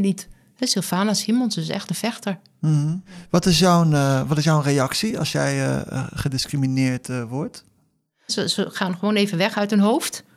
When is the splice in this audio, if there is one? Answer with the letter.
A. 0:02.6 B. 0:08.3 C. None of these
B